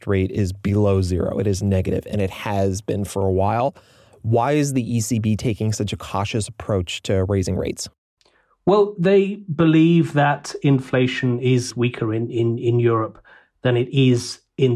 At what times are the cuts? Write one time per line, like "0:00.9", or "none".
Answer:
none